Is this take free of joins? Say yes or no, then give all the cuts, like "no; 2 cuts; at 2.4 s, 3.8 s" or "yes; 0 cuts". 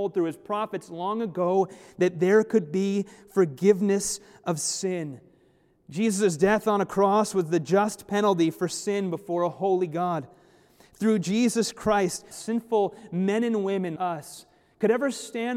no; 2 cuts; at 12.3 s, 14.0 s